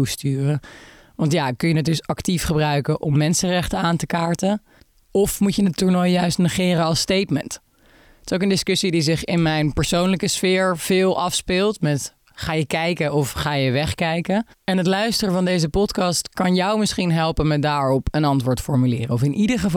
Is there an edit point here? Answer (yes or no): no